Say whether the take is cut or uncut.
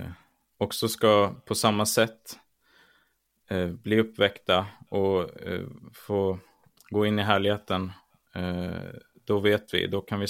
uncut